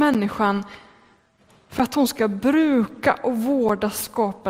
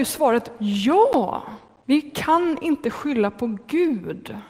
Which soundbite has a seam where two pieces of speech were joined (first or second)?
second